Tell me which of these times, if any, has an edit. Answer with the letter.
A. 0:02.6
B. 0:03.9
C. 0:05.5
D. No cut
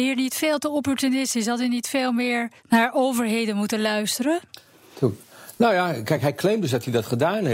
A